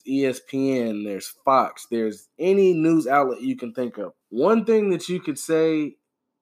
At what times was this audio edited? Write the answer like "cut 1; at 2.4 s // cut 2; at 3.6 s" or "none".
cut 1; at 4.2 s